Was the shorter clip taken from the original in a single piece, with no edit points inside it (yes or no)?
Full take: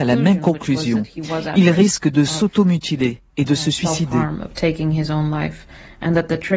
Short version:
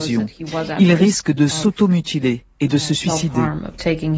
yes